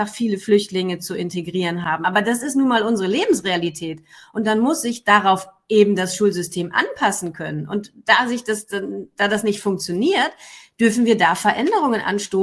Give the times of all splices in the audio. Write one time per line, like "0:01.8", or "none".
none

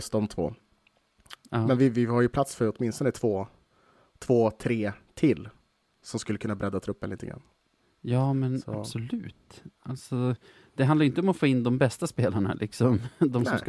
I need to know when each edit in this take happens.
none

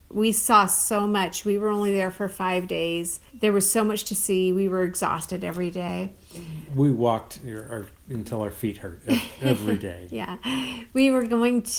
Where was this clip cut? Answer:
0:03.3

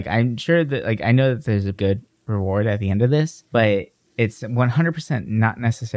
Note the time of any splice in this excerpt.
0:01.7
0:03.5

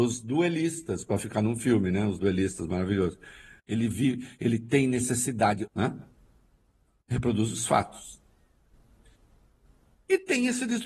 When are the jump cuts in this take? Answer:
0:03.6
0:05.7

